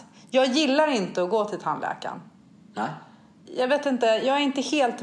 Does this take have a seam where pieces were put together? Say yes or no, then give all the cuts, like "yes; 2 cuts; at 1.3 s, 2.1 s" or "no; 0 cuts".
no; 0 cuts